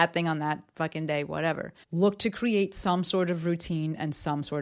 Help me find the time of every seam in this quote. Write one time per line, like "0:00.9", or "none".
0:01.8